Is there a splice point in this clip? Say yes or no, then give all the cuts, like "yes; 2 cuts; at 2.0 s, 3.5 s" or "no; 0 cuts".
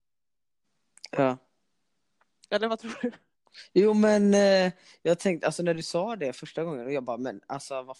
no; 0 cuts